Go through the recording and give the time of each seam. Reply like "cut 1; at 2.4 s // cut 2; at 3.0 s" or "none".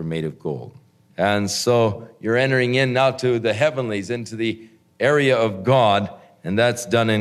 cut 1; at 1.1 s